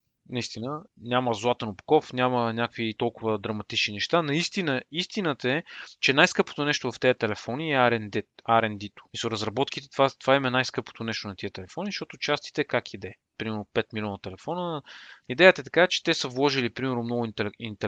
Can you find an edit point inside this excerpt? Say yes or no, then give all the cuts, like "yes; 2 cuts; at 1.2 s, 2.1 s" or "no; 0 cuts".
yes; 1 cut; at 13.2 s